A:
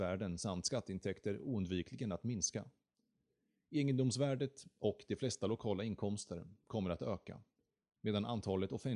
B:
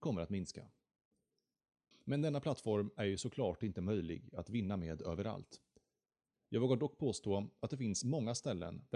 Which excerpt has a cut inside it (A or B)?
B